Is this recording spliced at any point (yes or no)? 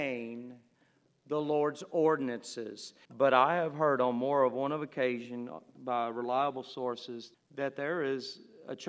yes